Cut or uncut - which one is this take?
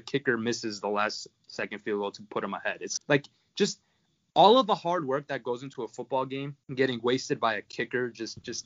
cut